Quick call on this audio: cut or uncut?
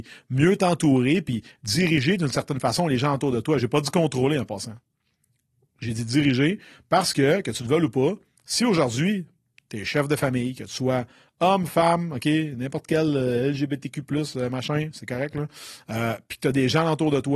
uncut